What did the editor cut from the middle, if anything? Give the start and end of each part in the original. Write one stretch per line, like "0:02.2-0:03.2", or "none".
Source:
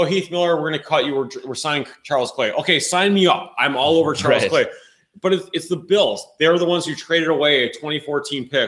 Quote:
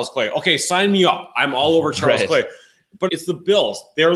0:05.3-0:05.5